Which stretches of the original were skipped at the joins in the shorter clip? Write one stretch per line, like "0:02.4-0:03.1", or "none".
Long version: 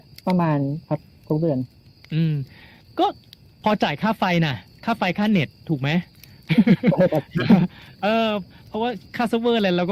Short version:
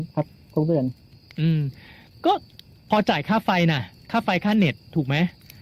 none